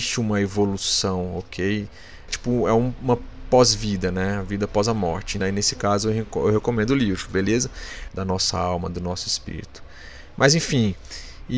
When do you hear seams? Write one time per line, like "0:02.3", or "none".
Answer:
0:02.3
0:05.4
0:08.1

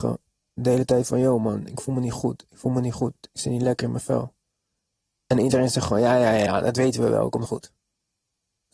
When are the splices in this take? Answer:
0:06.5

